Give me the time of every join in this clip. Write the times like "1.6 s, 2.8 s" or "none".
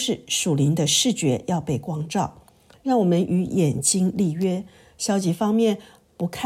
2.7 s